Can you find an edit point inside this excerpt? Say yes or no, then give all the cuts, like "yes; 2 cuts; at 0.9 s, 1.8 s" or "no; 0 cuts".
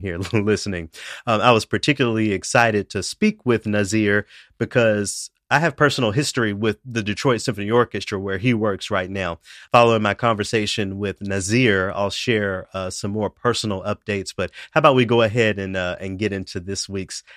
yes; 1 cut; at 9.7 s